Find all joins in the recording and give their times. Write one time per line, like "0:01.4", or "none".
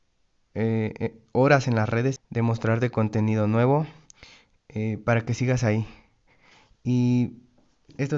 0:02.2